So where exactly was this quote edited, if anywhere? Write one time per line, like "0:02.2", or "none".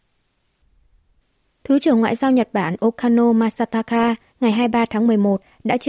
0:01.6